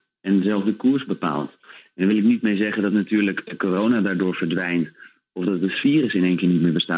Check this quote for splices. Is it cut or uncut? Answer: uncut